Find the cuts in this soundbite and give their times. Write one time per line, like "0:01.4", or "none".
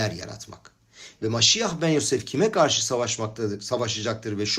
0:01.2